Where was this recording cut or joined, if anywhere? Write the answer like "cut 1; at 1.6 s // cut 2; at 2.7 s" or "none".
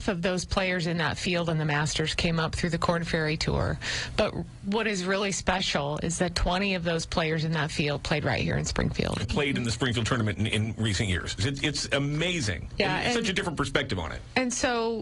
cut 1; at 9.2 s // cut 2; at 11.4 s